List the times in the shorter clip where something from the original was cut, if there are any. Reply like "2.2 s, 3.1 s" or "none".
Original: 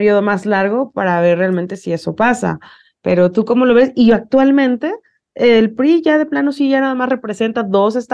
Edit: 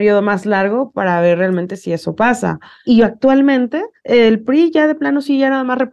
2.8 s, 4.0 s